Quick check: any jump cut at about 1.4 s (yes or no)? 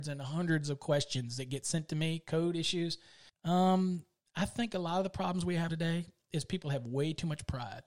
no